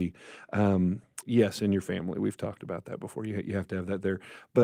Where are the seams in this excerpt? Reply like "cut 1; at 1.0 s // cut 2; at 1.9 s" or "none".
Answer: cut 1; at 1.2 s